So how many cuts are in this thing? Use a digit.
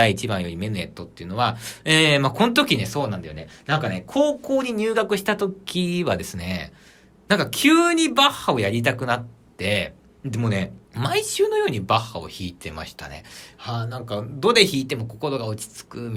2